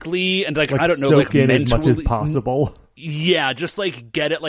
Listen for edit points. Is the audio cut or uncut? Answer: uncut